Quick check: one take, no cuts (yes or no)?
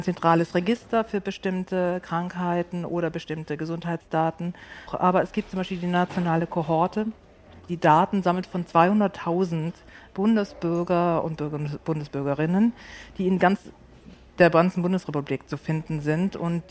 no